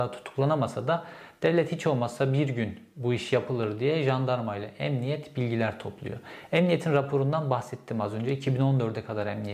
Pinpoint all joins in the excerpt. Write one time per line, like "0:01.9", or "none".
none